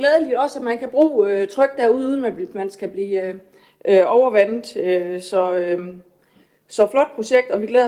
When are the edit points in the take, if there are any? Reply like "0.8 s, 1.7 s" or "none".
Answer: none